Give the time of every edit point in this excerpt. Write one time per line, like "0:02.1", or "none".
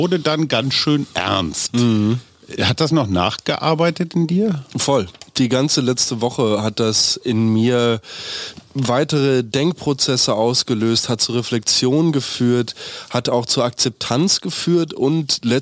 none

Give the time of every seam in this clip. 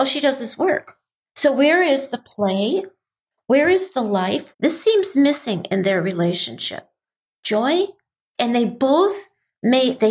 0:04.5

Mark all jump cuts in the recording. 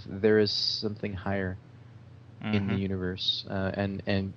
none

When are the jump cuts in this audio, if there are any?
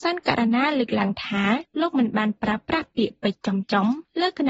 none

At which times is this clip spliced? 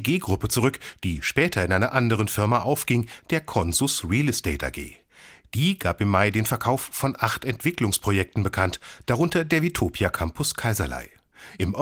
none

